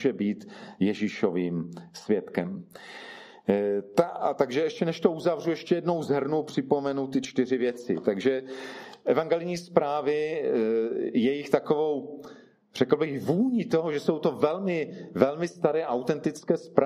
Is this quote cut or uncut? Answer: uncut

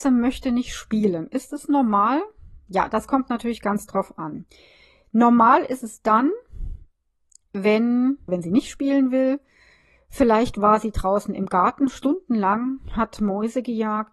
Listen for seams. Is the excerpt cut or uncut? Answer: cut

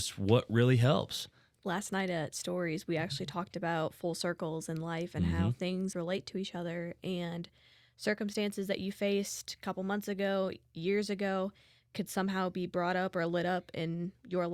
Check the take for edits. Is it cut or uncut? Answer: cut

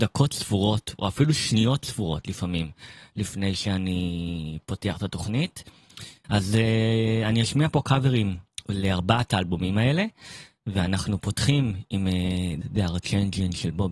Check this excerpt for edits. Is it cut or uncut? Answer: cut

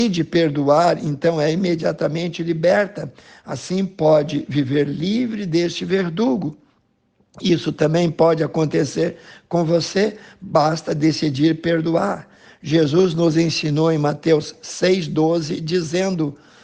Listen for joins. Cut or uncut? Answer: uncut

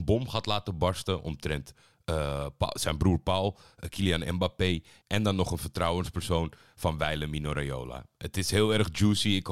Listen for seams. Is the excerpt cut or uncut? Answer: uncut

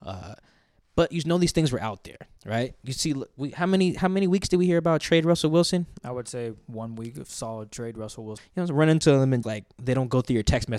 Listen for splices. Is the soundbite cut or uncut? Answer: cut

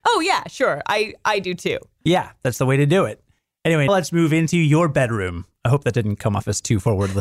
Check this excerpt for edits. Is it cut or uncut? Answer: cut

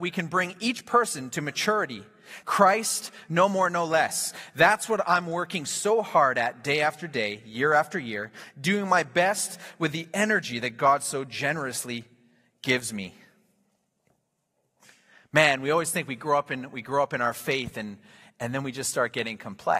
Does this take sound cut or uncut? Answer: cut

